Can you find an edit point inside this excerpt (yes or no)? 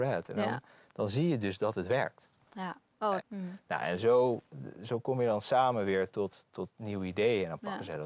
yes